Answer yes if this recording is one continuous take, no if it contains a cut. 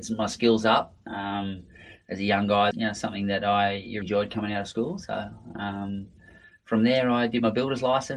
no